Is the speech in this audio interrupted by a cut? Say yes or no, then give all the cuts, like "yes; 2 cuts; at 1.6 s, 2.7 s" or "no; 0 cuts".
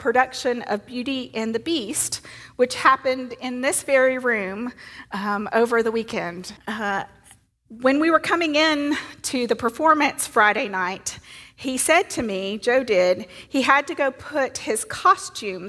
yes; 1 cut; at 6.6 s